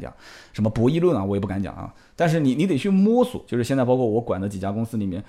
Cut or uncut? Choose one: cut